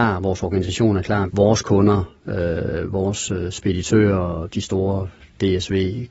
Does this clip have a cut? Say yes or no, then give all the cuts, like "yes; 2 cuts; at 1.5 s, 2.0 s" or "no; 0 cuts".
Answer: yes; 1 cut; at 1.3 s